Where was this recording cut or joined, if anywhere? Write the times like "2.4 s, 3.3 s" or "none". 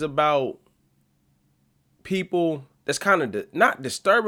2.7 s